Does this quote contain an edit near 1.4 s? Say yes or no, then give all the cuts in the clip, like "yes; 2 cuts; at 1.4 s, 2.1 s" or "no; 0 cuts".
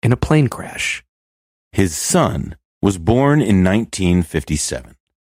no; 1 cut; at 2.7 s